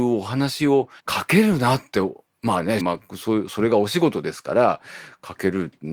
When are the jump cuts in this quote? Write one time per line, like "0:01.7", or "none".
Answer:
0:01.0
0:02.8